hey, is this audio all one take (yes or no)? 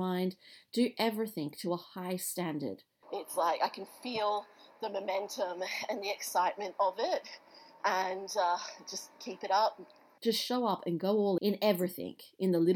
no